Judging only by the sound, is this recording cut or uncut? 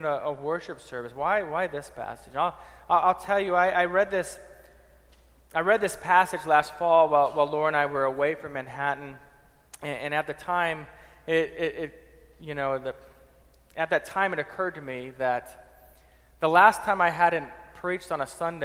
uncut